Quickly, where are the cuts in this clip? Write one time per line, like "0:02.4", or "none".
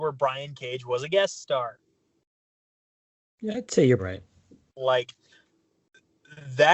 0:04.0